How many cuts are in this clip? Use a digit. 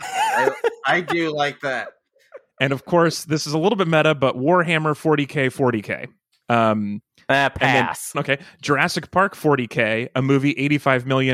2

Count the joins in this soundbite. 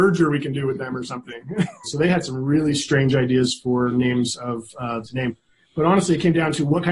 2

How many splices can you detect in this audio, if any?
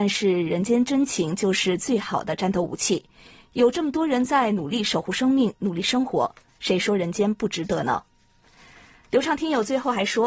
0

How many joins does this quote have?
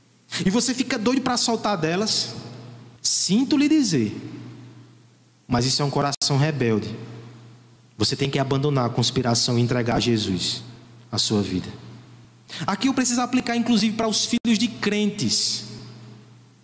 1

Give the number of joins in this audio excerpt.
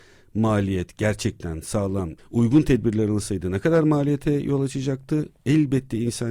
1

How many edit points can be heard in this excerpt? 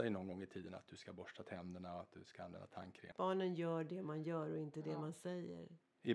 1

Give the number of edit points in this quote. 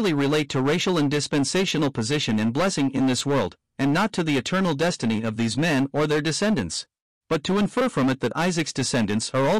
1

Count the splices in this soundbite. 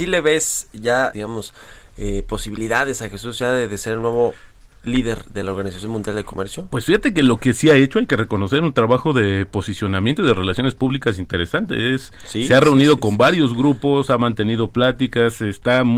1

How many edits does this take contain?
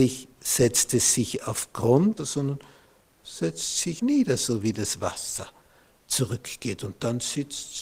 2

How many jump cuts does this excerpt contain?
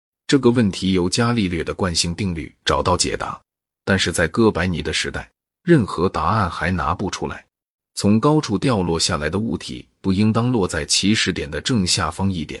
1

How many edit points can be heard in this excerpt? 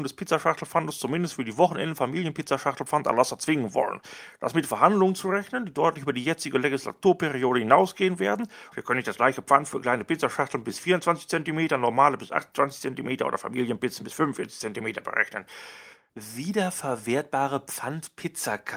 2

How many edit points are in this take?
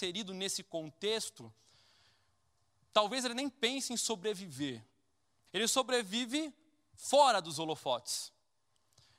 1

